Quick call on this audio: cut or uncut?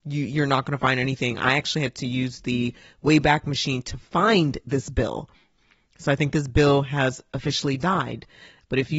uncut